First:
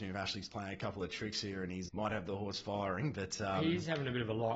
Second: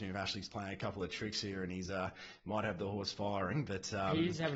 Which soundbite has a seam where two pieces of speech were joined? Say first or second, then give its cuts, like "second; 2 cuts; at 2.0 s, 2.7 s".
first; 1 cut; at 1.9 s